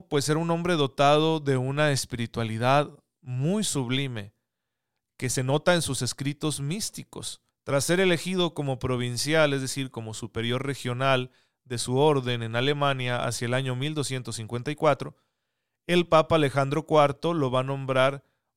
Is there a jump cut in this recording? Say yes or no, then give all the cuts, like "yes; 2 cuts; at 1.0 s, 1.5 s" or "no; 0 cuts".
yes; 1 cut; at 7.5 s